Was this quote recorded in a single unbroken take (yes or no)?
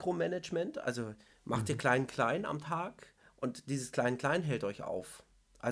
yes